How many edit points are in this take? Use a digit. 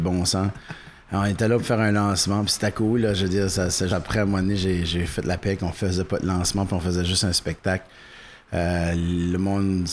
1